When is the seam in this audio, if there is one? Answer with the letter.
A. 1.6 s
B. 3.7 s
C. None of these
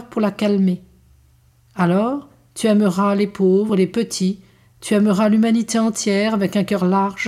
C